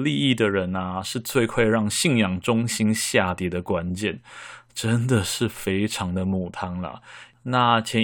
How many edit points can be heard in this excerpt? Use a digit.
0